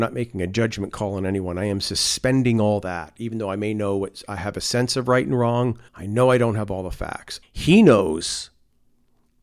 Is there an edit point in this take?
yes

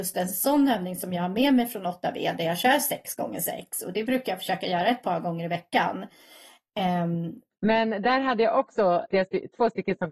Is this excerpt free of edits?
no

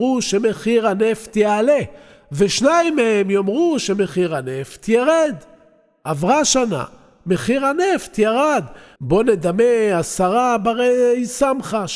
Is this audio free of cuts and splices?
no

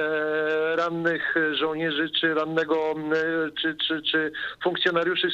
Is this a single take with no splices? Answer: yes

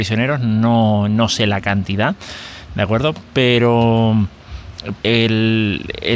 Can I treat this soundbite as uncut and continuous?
no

